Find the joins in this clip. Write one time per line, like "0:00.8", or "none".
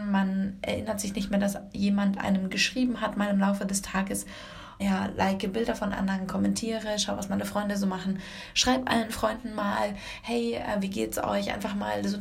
0:04.8